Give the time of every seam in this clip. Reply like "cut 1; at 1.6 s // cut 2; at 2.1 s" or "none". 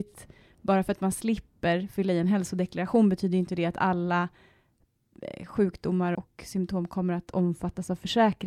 cut 1; at 6.1 s